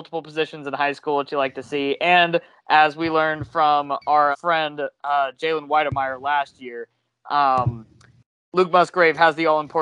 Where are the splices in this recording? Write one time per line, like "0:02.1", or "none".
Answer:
0:04.3